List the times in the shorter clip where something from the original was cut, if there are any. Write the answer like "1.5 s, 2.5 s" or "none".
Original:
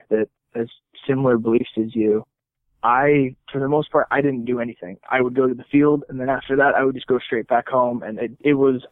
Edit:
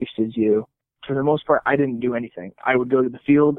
1.0 s